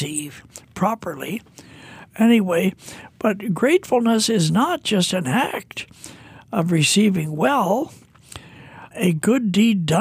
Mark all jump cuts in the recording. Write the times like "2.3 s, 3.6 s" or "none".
8.9 s